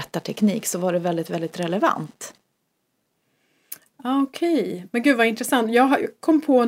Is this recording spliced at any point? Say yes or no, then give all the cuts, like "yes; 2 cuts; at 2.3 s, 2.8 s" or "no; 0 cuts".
no; 0 cuts